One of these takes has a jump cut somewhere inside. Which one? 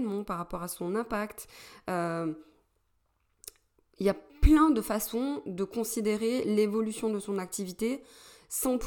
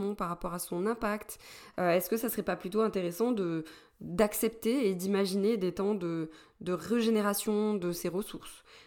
second; 1 cut; at 1.7 s

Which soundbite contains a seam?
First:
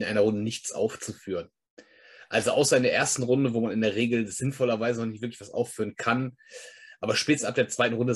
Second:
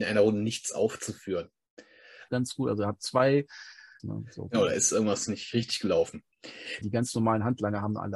second; 3 cuts; at 2.3 s, 4.0 s, 6.8 s

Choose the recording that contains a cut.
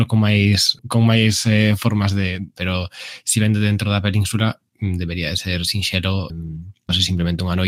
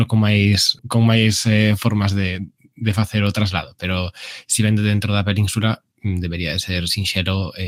first; 2 cuts; at 2.5 s, 6.3 s

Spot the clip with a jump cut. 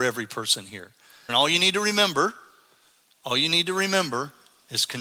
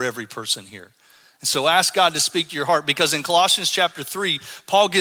first; 1 cut; at 1.3 s

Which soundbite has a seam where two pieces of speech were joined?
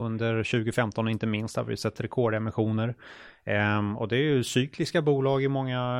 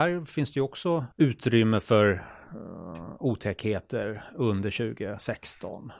second; 1 cut; at 1.1 s

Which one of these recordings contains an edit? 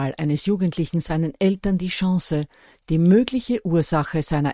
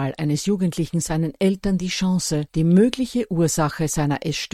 second; 1 cut; at 2.5 s

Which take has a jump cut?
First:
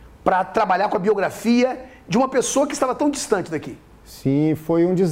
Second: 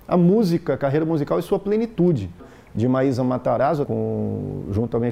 second; 2 cuts; at 2.4 s, 3.8 s

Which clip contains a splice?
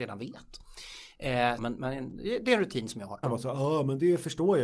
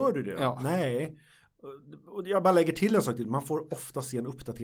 first; 2 cuts; at 1.6 s, 3.2 s

